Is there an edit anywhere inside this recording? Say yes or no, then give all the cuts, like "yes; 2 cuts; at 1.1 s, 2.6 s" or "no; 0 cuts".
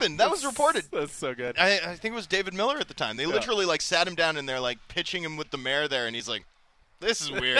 no; 0 cuts